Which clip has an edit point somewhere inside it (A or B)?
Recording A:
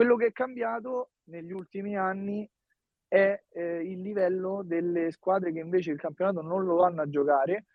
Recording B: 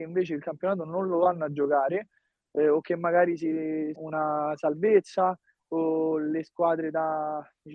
B